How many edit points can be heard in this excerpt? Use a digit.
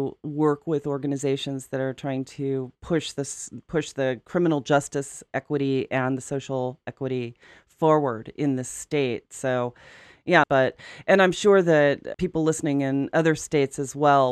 2